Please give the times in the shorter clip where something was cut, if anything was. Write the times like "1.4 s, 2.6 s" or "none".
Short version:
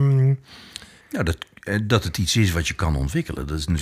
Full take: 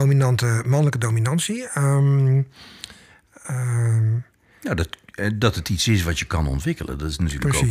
1.0 s